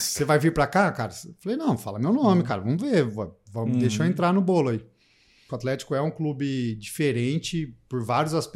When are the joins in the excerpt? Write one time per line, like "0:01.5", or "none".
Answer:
0:05.5